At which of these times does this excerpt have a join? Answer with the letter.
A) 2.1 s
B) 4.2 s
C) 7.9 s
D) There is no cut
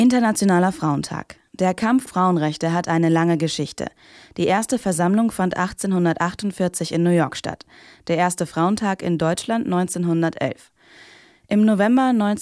A